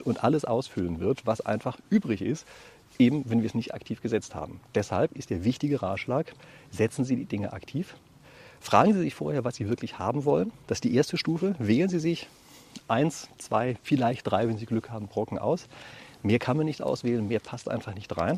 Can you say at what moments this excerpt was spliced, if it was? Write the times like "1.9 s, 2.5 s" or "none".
none